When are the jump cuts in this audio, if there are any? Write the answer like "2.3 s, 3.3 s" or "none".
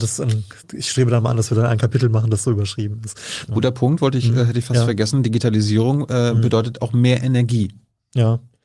3.5 s

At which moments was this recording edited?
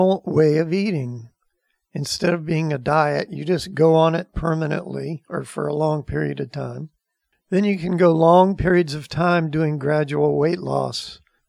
none

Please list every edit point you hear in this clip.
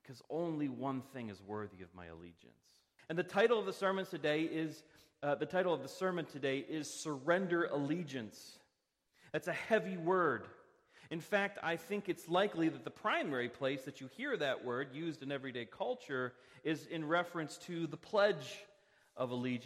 3.0 s

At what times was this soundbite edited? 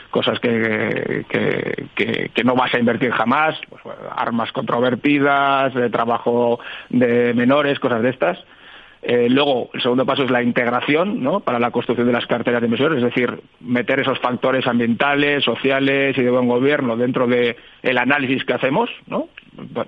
none

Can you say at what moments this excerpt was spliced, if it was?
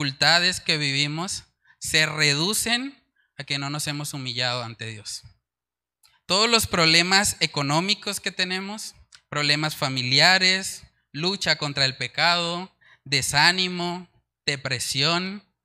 none

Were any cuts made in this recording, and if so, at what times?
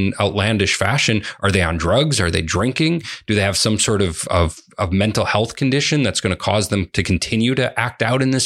none

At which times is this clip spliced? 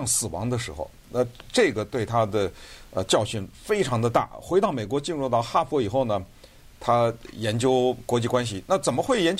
none

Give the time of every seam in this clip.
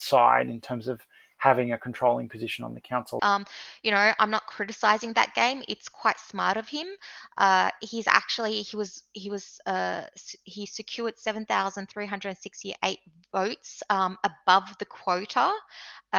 3.2 s

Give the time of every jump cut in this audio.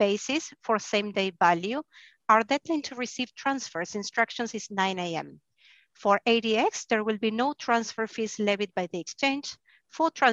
none

